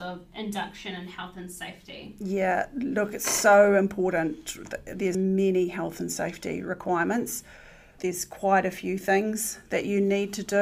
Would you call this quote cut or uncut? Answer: cut